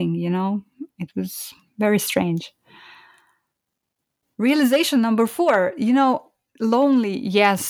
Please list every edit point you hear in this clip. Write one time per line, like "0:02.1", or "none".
none

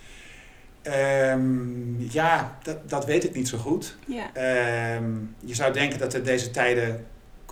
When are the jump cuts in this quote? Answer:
none

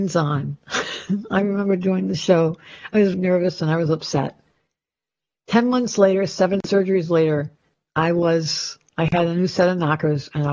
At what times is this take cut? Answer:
0:03.1

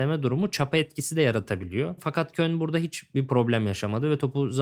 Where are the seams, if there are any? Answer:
0:02.0

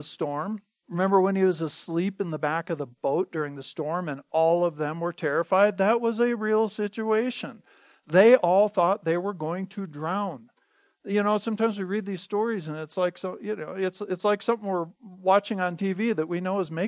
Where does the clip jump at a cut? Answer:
none

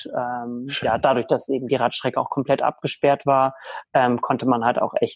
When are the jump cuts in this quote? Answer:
none

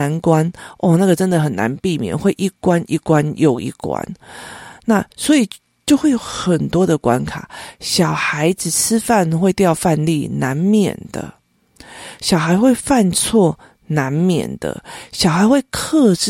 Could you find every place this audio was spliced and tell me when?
none

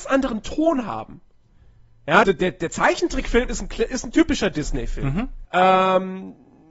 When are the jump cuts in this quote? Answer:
0:02.2
0:05.4

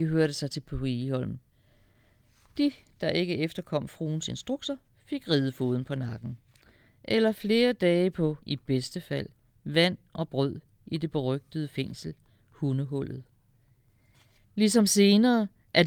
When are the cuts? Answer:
0:06.9
0:14.4

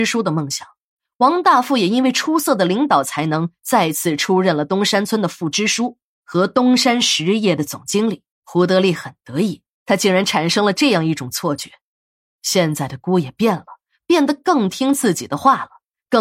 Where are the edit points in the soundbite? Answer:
0:08.3
0:09.8

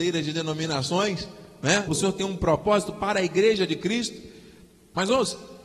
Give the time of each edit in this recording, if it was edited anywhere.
0:01.9

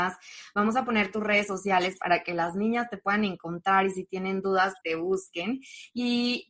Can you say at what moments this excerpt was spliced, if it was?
0:04.8

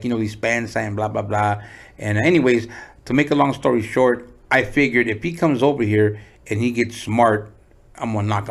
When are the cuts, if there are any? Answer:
none

